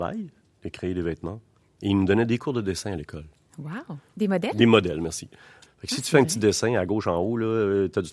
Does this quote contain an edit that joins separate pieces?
yes; 2 cuts; at 4.1 s, 5.7 s

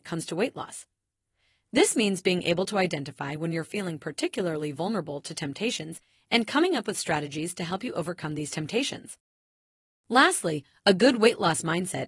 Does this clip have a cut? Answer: no; 0 cuts

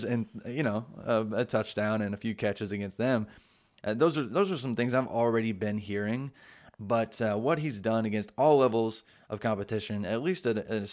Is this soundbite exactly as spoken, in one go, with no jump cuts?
no; 1 cut; at 3.8 s

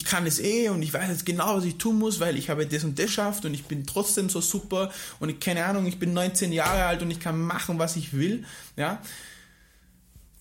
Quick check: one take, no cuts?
no; 1 cut; at 3.1 s

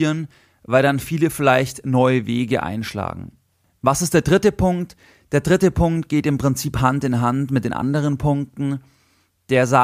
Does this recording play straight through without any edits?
yes; 0 cuts

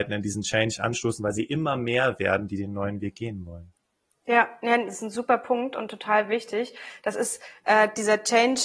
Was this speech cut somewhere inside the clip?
no; 0 cuts

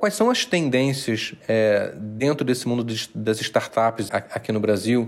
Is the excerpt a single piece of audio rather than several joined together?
no; 1 cut; at 4.1 s

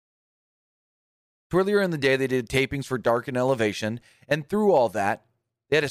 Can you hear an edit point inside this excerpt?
no; 0 cuts

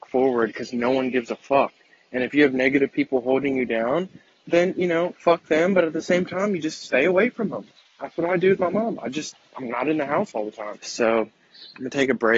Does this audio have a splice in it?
yes; 3 cuts; at 4.4 s, 9.5 s, 10.8 s

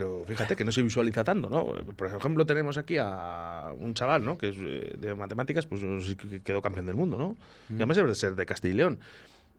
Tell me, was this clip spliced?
no; 0 cuts

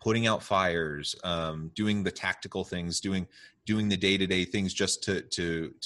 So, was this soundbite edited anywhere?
no; 0 cuts

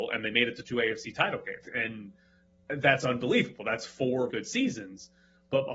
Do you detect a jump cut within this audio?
yes; 2 cuts; at 1.6 s, 4.3 s

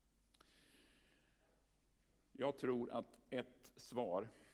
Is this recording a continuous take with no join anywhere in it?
yes; 0 cuts

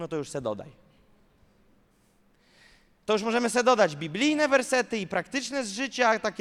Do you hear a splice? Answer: no; 0 cuts

